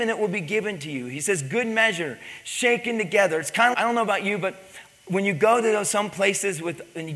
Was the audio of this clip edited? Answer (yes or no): yes